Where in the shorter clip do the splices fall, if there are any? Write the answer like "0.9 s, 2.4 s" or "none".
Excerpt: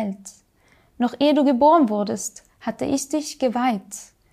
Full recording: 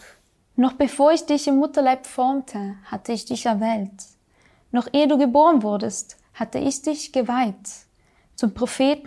none